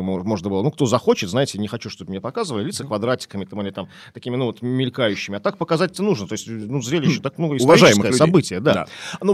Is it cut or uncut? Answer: uncut